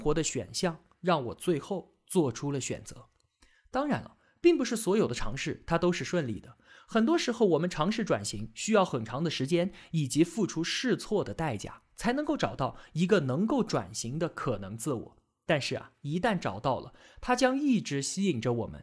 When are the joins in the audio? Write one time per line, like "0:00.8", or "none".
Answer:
none